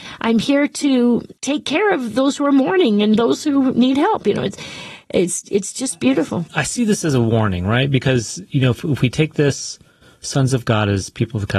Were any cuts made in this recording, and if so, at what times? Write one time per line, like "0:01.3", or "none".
0:01.4